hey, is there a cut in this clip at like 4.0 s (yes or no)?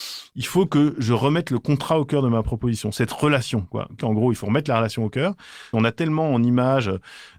yes